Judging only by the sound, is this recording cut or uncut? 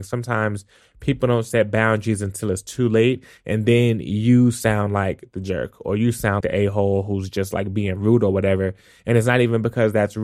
cut